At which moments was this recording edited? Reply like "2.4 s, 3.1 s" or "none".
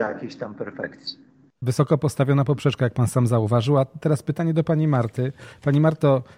none